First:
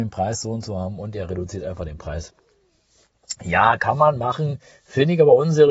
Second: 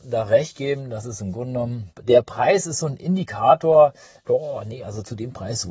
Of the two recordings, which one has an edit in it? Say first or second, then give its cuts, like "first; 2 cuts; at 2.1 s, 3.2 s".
second; 2 cuts; at 1.9 s, 4.2 s